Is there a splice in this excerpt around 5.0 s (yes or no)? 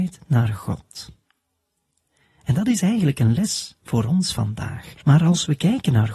yes